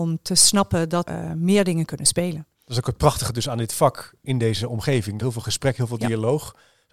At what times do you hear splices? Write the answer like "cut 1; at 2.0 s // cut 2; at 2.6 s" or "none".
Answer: cut 1; at 1.1 s // cut 2; at 2.5 s // cut 3; at 5.2 s